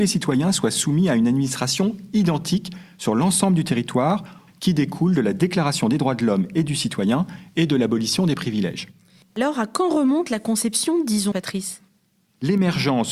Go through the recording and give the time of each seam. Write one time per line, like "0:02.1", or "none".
0:04.5
0:09.2
0:11.3